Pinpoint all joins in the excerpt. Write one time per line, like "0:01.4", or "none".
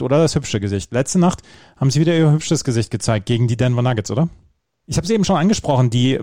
0:04.8